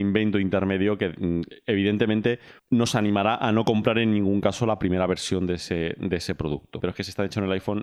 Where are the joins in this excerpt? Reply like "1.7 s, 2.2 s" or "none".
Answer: 2.6 s, 6.8 s

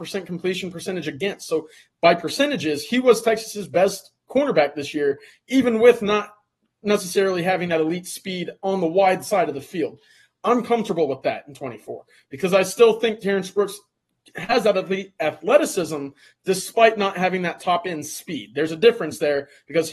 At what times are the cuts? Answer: 4.2 s

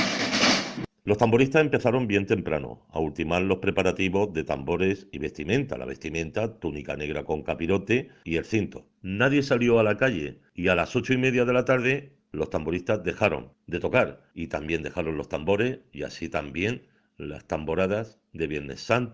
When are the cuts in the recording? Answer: 9.0 s, 12.2 s

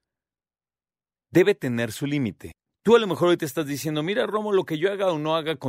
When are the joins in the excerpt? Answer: none

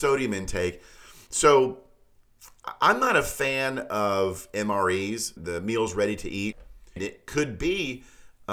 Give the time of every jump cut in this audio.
1.3 s, 5.4 s, 7.0 s

